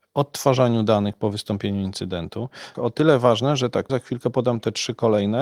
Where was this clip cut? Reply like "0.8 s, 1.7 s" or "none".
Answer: 2.7 s, 3.9 s